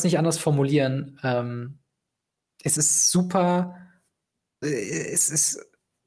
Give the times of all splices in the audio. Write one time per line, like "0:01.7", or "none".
0:02.8
0:04.6